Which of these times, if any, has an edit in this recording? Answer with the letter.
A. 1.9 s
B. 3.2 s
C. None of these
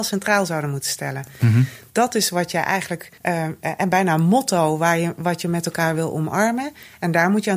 B